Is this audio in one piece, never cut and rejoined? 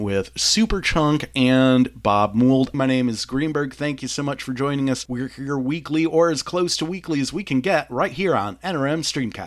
no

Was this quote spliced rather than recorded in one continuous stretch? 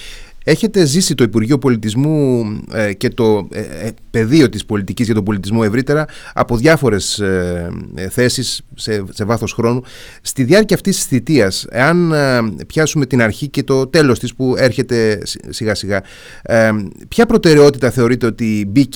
no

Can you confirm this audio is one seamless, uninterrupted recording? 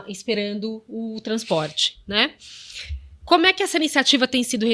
yes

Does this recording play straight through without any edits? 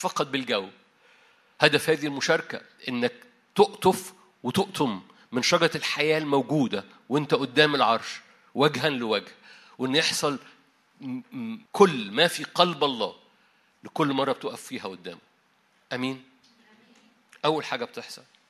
no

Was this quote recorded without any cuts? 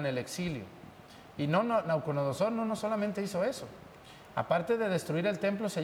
yes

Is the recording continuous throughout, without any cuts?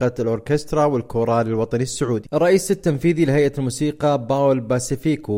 yes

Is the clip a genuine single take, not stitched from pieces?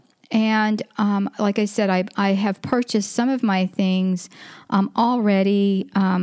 yes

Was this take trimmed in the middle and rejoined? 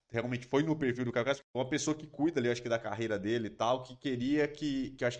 yes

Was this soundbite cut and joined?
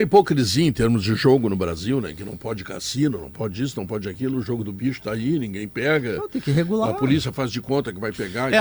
no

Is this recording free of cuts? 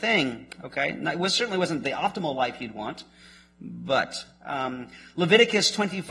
yes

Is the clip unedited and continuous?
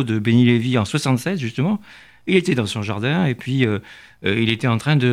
yes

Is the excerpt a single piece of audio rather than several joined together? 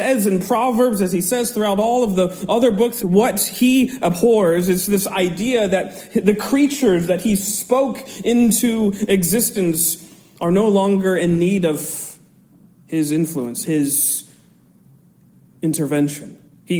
no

